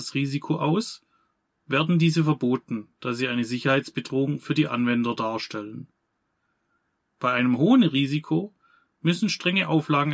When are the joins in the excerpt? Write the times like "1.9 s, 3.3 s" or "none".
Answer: none